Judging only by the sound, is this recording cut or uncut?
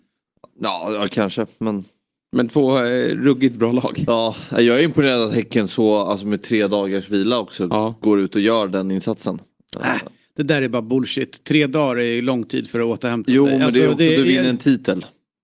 uncut